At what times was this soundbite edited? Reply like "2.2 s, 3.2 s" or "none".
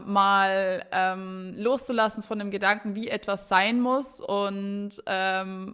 none